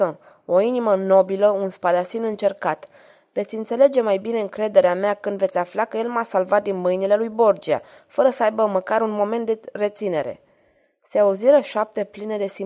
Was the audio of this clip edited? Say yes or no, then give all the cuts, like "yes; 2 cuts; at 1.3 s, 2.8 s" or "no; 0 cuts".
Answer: no; 0 cuts